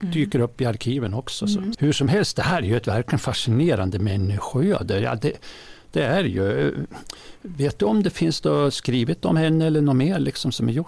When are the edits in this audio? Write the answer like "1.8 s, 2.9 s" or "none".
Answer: 1.7 s